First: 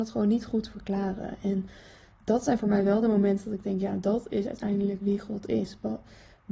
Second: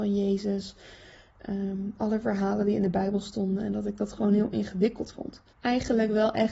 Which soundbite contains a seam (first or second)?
second